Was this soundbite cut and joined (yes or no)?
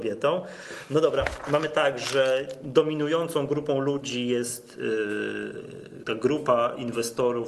no